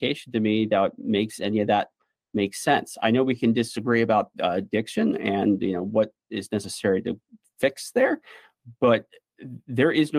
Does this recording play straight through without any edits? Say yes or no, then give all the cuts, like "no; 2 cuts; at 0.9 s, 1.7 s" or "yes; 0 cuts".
yes; 0 cuts